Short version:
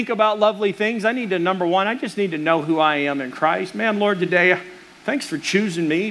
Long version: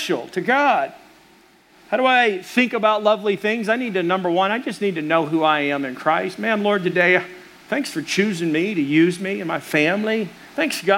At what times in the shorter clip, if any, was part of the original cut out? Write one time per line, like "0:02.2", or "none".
none

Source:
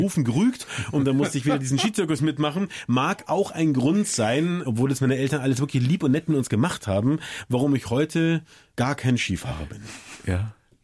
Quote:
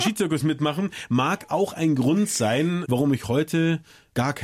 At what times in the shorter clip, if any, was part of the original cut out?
0:02.9

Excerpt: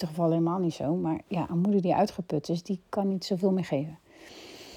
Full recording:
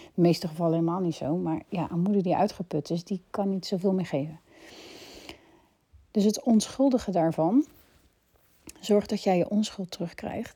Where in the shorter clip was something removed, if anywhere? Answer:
none

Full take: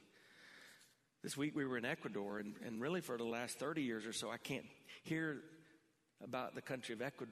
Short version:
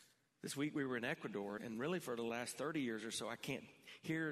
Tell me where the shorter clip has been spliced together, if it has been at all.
0:01.6

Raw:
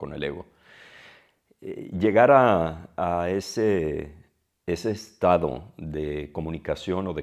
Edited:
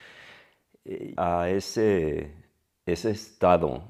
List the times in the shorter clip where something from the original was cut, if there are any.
0:01.1

